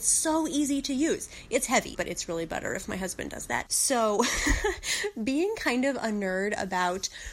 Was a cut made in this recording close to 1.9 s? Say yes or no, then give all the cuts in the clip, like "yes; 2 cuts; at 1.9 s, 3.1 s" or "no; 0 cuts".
yes; 2 cuts; at 1.9 s, 3.7 s